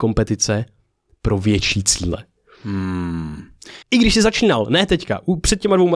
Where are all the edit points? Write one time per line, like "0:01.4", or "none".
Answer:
0:03.8